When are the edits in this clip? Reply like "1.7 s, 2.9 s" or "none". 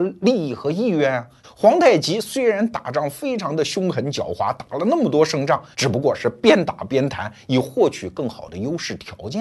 1.4 s, 5.7 s